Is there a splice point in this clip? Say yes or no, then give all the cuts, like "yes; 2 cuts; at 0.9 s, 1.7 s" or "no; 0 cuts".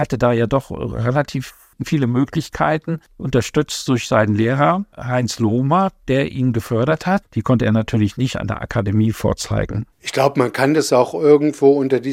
yes; 1 cut; at 7.2 s